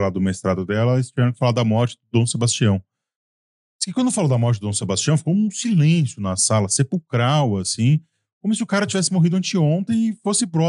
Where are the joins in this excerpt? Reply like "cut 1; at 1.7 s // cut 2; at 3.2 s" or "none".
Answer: none